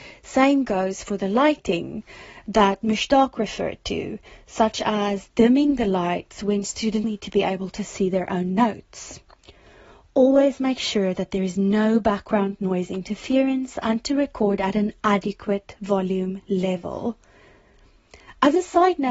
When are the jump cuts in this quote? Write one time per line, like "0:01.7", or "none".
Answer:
0:07.0